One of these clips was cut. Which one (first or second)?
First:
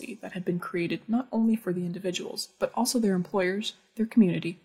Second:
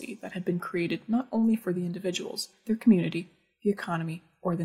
second